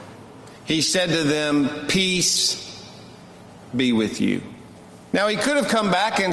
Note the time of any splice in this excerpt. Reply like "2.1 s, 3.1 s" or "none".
5.1 s